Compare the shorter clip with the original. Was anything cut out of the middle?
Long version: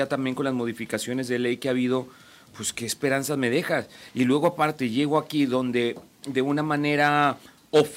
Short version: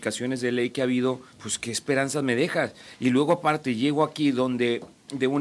yes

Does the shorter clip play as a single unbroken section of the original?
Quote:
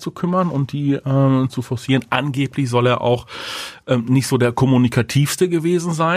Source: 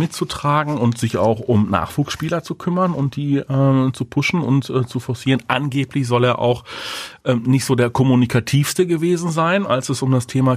no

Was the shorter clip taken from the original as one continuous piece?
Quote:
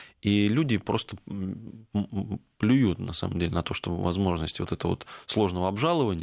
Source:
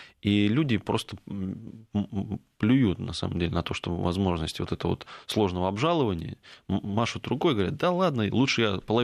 yes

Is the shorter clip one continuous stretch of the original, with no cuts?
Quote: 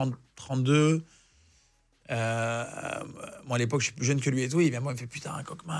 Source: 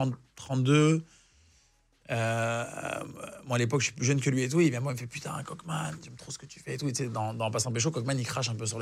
yes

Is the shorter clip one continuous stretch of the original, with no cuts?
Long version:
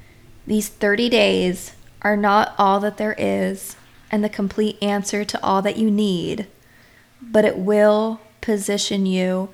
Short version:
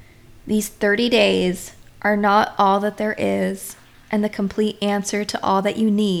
yes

